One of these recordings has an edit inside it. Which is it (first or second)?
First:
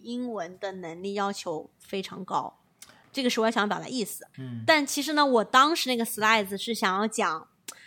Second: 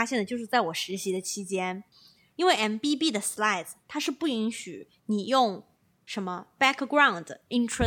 first